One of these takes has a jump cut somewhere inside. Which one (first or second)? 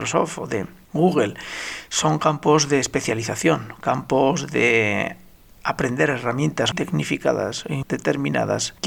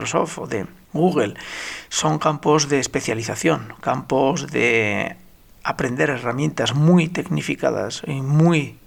first